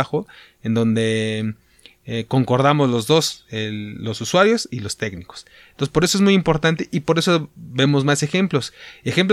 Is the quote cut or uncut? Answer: uncut